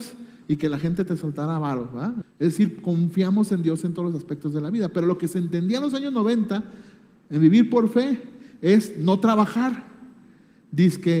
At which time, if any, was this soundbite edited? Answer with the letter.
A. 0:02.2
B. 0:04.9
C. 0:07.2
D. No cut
A